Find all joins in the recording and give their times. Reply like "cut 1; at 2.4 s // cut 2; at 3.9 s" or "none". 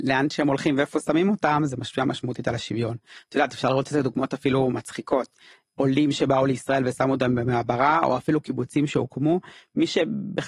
none